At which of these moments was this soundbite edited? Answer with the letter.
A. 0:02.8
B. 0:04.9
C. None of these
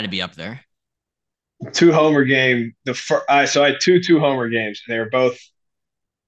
C